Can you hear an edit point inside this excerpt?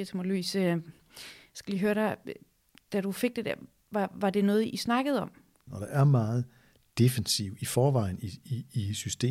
yes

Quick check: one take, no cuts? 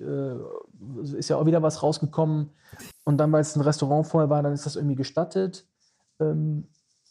no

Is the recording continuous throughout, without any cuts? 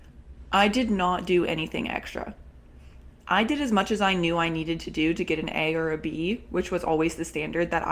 yes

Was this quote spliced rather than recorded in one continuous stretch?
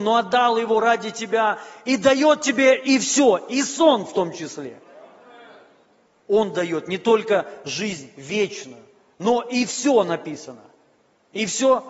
yes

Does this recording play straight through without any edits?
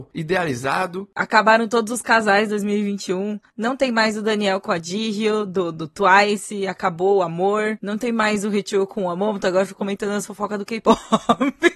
yes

